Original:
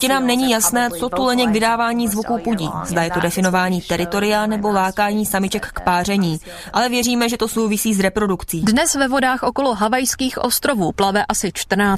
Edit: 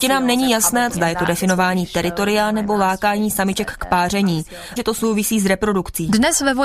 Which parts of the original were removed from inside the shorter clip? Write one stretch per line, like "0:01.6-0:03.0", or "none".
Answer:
0:00.9-0:02.9
0:06.7-0:07.3